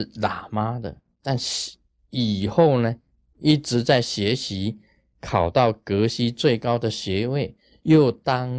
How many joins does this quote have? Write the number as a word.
zero